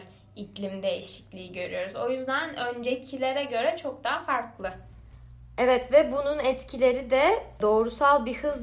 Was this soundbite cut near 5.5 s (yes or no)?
no